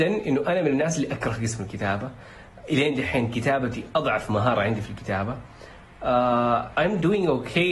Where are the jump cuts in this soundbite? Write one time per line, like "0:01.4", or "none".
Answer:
0:06.7